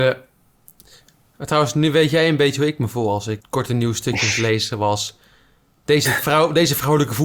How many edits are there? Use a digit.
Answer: 1